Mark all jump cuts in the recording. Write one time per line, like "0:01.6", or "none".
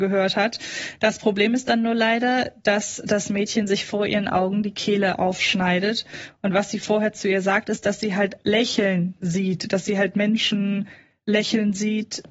none

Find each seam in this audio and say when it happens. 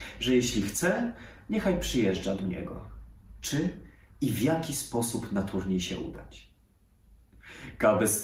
0:03.4

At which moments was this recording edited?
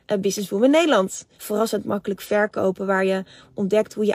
0:01.3

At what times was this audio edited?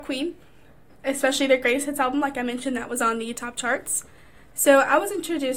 none

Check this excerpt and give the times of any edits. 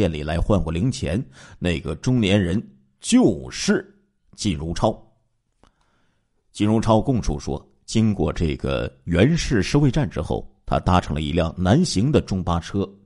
none

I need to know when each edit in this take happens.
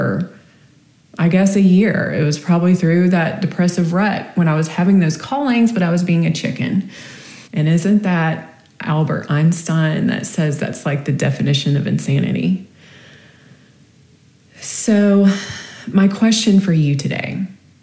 0:07.5

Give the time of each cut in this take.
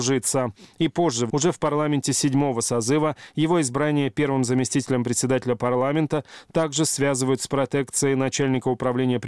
0:01.3

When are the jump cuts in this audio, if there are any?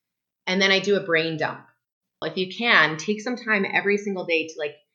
0:02.2

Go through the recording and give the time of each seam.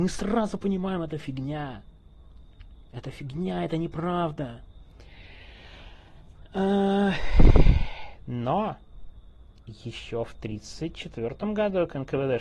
none

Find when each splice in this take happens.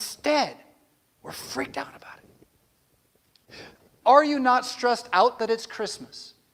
0:04.0

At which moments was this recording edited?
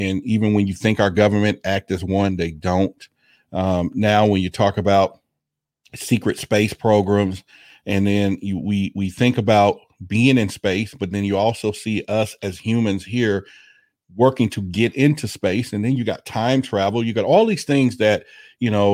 none

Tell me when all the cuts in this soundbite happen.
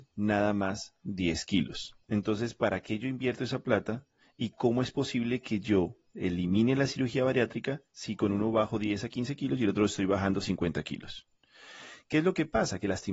0:02.0

